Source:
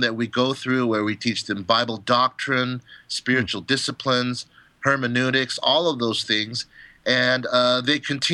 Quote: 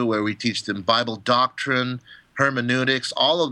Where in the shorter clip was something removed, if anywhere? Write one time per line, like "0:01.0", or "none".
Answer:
0:02.2